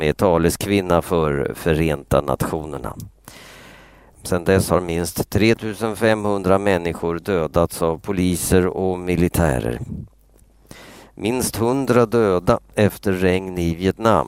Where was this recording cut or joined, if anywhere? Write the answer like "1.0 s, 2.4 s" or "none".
4.1 s